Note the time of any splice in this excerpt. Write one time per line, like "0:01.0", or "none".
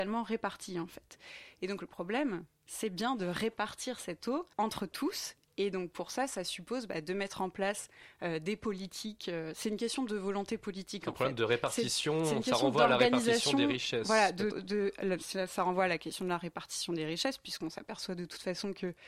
0:04.5
0:14.5